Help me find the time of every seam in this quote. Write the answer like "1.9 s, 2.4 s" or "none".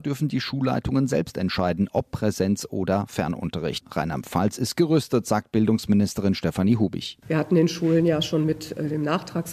3.8 s